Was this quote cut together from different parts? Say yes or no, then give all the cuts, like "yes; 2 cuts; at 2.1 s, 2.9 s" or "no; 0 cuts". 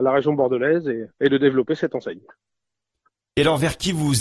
yes; 1 cut; at 1.1 s